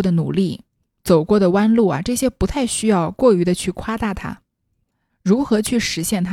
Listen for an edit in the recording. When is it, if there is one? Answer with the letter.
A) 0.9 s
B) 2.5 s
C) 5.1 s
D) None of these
C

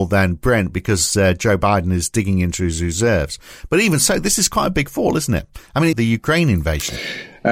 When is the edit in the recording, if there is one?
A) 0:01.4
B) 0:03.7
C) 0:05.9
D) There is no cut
C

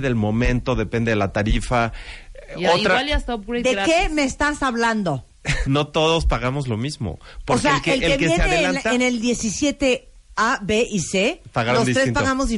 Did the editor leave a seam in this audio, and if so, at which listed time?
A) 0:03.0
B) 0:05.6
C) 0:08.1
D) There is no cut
B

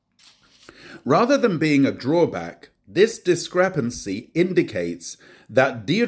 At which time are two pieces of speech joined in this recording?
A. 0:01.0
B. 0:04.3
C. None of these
B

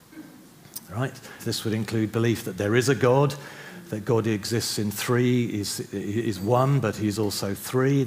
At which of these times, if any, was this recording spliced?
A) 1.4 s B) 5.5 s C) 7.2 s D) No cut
A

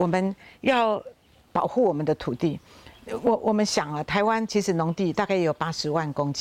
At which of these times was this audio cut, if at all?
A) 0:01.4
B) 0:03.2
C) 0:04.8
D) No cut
D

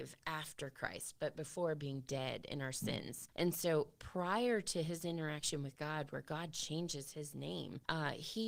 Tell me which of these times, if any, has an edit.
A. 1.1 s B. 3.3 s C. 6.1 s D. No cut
B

